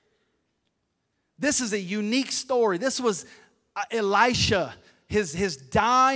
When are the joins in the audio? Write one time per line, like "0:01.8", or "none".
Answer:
none